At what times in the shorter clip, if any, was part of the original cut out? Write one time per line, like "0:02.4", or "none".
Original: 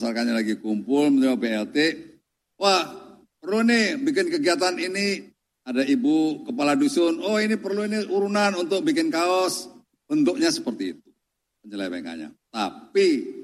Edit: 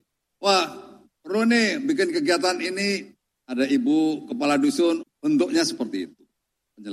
0:05.0